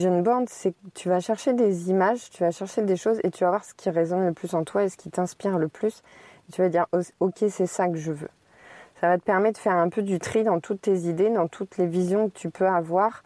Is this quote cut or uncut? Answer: uncut